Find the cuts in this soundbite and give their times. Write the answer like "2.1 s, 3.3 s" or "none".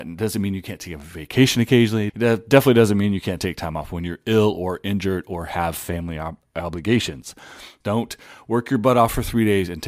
2.1 s, 7.8 s